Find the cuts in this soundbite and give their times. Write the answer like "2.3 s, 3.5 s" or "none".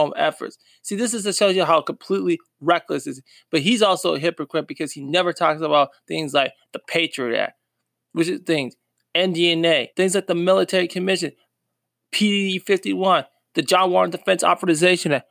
9.9 s